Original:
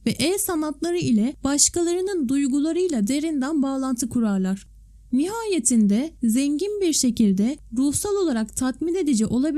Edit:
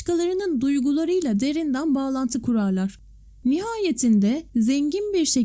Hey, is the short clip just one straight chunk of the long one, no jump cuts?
yes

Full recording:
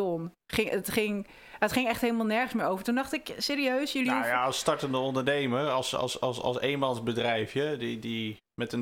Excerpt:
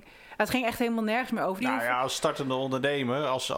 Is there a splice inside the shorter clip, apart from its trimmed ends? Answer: yes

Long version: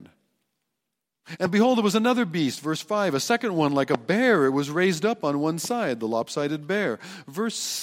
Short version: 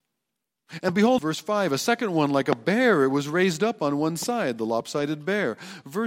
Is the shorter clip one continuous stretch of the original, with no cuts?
no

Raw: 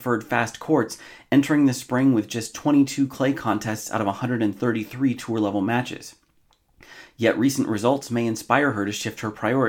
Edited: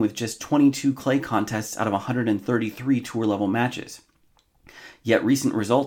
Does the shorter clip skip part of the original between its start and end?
no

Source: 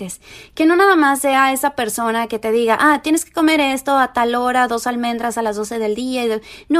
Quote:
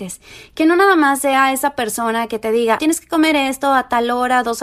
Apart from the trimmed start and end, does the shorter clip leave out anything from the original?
yes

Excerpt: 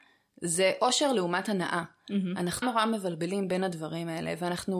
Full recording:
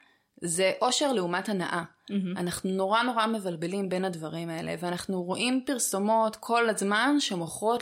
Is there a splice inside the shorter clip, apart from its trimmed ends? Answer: yes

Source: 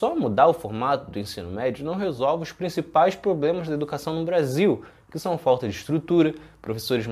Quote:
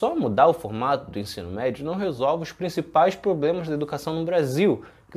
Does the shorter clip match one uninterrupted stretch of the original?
yes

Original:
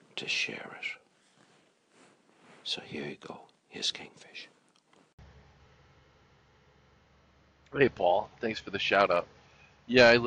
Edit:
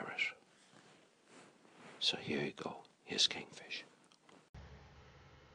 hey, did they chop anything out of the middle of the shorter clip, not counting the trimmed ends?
no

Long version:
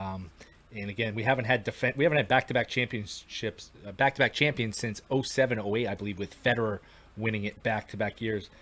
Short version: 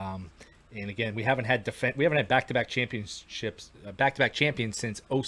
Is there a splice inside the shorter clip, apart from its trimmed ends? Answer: no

